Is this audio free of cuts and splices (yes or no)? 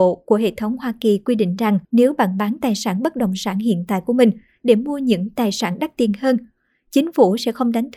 no